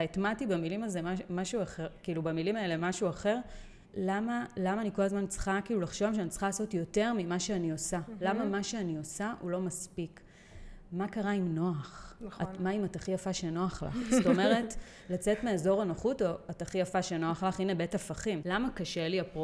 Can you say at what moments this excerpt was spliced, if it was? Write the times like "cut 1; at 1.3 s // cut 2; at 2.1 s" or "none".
cut 1; at 3.8 s // cut 2; at 12.6 s // cut 3; at 18.4 s